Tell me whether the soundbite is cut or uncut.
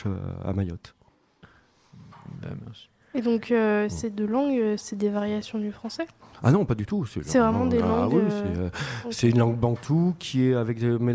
uncut